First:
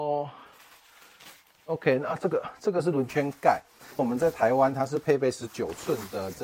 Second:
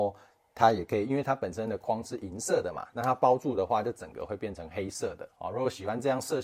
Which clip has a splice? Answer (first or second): first